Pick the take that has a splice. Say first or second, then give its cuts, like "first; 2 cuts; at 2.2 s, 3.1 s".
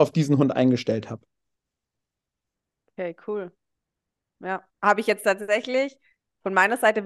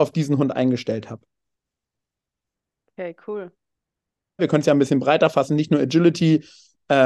second; 1 cut; at 4.4 s